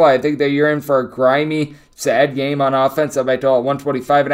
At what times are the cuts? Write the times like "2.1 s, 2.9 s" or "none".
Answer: 1.9 s